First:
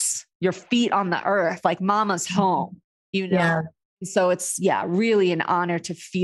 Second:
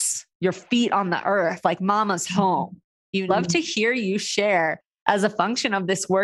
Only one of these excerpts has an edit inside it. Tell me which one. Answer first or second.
second